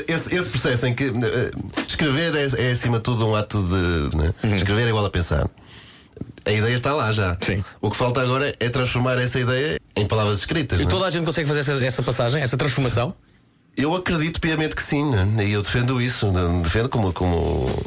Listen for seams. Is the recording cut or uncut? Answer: cut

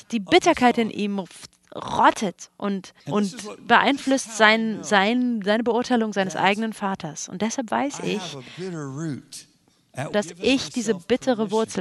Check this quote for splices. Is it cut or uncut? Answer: cut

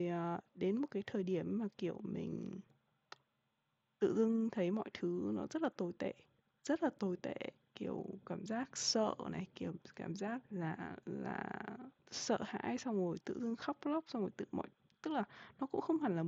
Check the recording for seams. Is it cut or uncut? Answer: cut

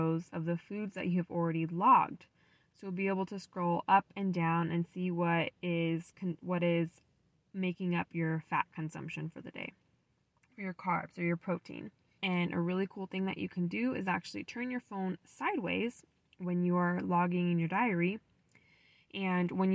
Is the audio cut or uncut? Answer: cut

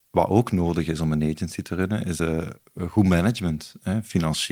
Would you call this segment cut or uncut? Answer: uncut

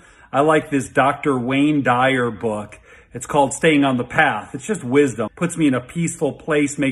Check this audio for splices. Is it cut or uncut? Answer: cut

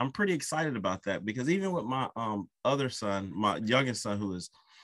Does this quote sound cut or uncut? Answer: uncut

